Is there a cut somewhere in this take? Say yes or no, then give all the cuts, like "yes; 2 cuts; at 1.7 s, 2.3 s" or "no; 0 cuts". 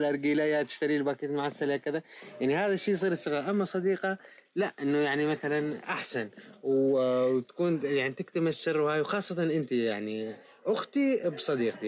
no; 0 cuts